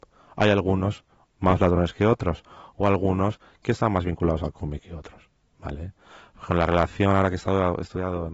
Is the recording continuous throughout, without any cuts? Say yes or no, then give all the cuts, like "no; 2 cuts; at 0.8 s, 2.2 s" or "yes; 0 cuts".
yes; 0 cuts